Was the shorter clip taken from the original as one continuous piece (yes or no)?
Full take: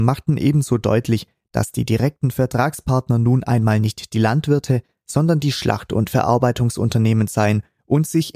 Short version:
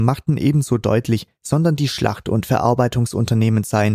no